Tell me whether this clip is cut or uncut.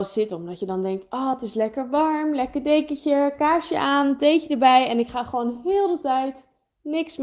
uncut